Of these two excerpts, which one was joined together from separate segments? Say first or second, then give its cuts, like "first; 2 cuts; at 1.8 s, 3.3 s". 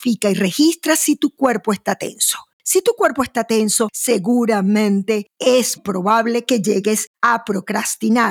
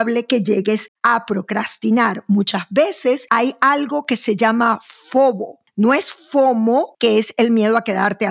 first; 1 cut; at 5.8 s